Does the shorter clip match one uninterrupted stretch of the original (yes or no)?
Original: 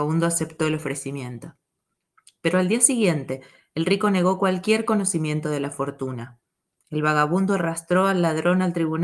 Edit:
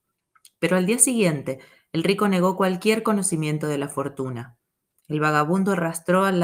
yes